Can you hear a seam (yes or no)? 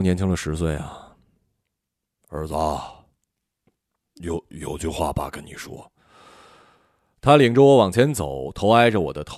yes